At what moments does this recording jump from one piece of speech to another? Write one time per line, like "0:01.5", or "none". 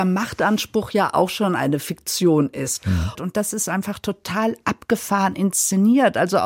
0:03.2